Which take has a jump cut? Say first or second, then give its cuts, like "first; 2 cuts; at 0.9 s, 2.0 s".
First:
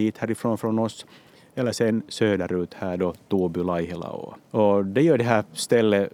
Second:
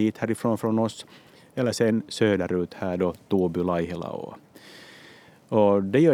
first; 1 cut; at 4.4 s